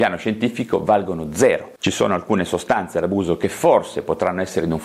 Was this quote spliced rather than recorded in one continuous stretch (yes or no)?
no